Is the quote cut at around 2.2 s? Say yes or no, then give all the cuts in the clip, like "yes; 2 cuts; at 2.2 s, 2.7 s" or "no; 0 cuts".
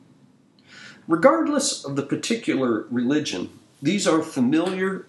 no; 1 cut; at 1.0 s